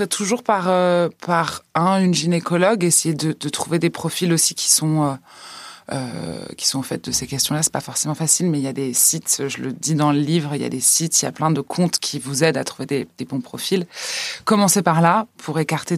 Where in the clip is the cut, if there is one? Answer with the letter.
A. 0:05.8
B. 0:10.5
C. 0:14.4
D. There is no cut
D